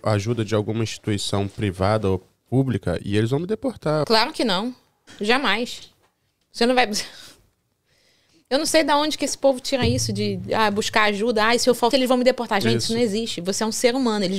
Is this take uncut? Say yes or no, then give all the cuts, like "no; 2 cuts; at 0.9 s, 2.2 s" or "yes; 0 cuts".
no; 2 cuts; at 4.0 s, 11.9 s